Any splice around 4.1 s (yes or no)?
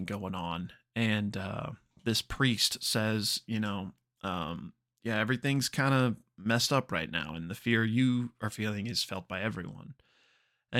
no